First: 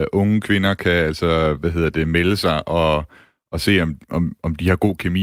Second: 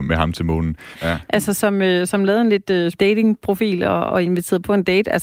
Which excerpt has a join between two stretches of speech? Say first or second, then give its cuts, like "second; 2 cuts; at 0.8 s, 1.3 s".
second; 3 cuts; at 0.9 s, 2.9 s, 4.1 s